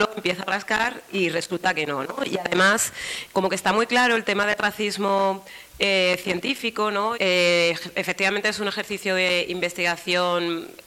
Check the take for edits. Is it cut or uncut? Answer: cut